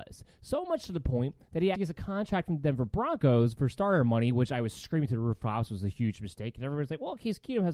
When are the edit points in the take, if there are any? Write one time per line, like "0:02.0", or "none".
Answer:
0:01.7